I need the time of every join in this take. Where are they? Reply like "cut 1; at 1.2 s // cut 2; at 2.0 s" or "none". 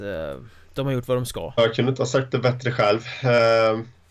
cut 1; at 1.6 s